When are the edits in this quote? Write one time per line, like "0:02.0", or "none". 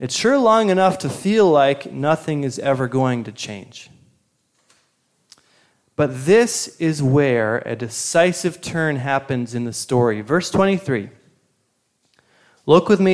none